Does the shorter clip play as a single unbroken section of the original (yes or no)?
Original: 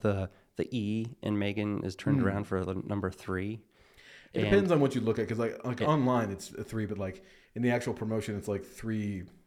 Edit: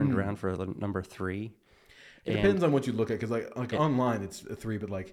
yes